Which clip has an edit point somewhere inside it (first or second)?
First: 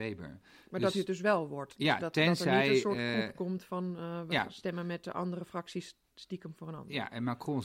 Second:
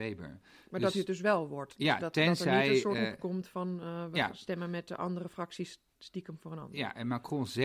second